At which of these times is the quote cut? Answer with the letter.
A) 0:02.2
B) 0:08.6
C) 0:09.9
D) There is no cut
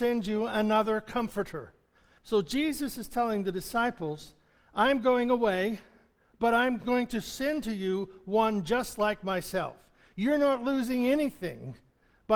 A